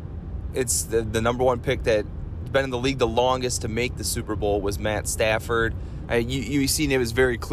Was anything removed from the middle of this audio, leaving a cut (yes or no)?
yes